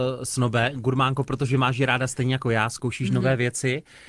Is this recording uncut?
yes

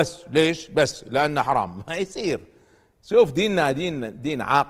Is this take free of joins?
yes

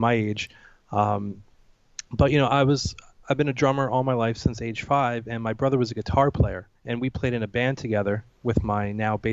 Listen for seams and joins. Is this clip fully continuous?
no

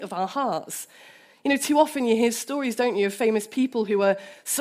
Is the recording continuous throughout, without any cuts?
yes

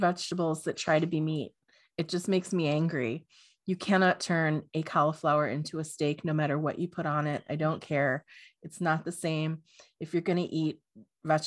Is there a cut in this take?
no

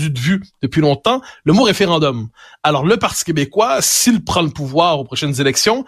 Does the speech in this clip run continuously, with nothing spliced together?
yes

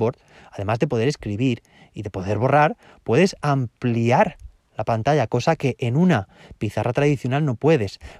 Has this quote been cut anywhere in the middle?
no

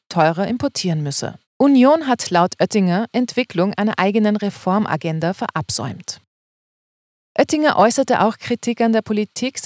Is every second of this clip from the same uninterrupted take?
no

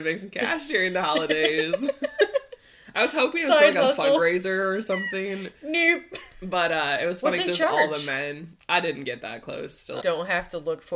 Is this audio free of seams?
no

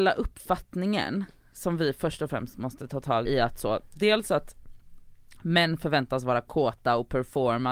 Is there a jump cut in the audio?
yes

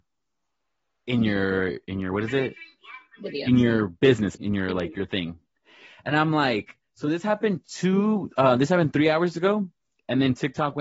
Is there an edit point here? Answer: yes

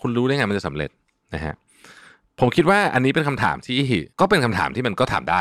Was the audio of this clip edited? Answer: yes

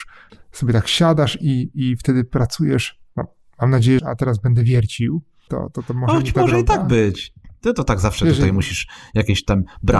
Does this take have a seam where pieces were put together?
yes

